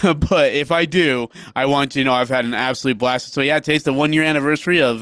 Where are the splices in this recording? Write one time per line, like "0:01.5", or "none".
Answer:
none